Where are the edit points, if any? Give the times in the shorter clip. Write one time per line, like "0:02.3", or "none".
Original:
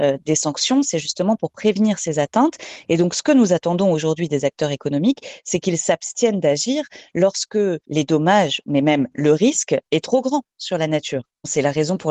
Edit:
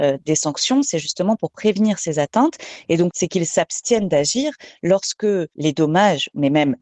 0:03.1